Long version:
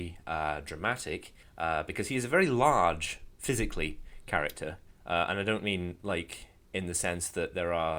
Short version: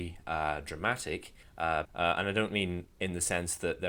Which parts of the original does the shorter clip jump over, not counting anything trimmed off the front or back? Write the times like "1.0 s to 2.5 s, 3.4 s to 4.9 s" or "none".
1.8 s to 5.0 s, 6.0 s to 6.6 s

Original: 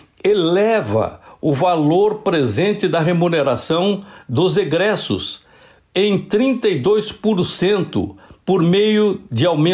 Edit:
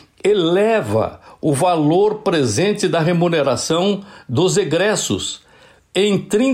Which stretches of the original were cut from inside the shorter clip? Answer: none

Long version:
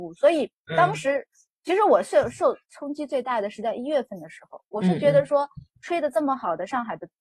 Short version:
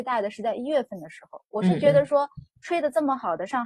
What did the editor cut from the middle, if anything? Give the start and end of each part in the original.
none

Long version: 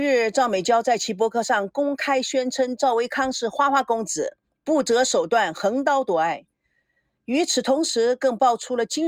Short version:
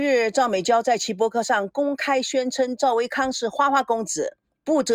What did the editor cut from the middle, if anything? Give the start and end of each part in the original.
none

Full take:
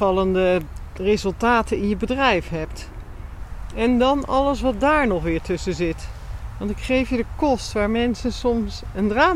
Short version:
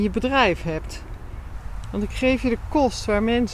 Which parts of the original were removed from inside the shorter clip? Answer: 3.7 s to 6.5 s

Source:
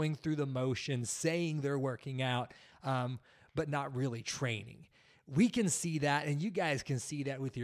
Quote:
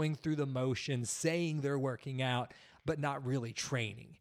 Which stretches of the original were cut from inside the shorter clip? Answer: 2.8 s to 3.5 s

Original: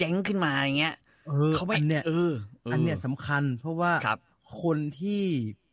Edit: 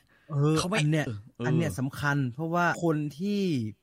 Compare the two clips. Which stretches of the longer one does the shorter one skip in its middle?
2.0 s to 2.3 s, 4.0 s to 4.6 s

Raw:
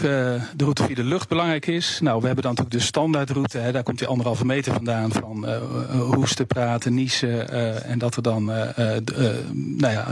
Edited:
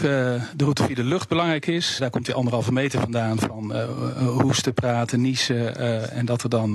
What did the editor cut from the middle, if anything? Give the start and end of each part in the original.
2.0 s to 3.7 s

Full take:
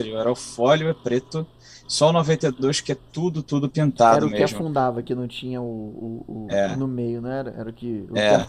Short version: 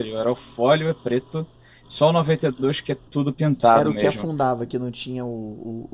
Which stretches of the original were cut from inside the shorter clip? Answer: 3.1 s to 3.4 s

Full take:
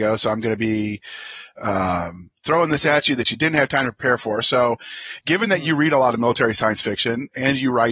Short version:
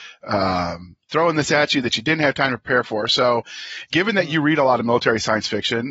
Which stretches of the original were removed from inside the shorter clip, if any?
none

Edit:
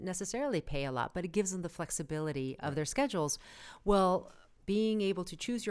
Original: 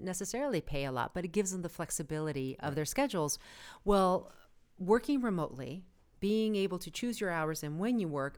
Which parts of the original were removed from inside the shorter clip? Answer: 4.6 s to 6.1 s

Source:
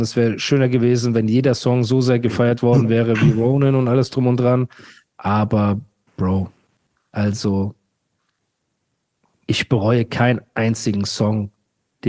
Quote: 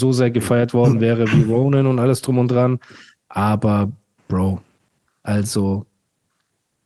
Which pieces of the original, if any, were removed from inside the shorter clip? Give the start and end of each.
none

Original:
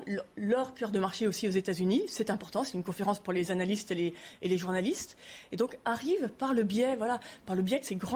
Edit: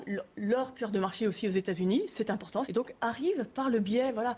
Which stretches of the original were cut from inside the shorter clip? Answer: 2.6 s to 5.5 s

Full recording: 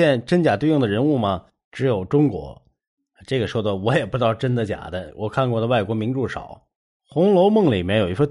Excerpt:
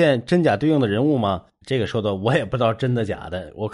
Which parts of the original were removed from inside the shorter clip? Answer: 1.6 s to 3.2 s

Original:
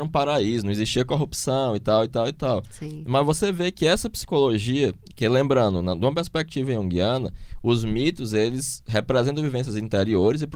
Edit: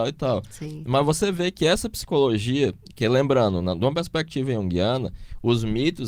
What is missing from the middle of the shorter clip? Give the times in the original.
none

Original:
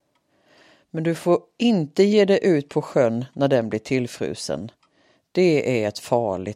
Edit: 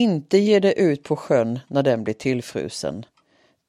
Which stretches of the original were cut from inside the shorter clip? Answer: none

